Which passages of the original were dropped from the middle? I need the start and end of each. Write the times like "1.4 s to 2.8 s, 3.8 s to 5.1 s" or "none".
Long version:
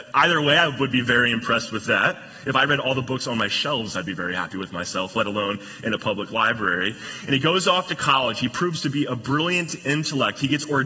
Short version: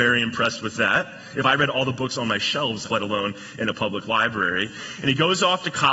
3.9 s to 5.1 s